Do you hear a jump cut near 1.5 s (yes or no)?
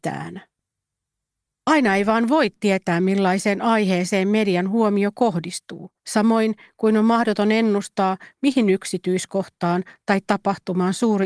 yes